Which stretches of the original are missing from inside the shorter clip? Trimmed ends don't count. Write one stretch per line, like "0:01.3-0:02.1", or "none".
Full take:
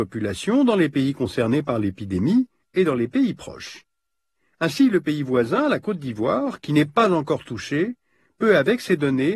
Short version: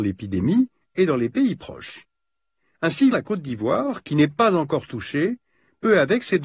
0:04.9-0:05.7